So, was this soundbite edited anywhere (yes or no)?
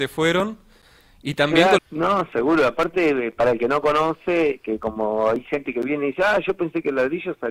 yes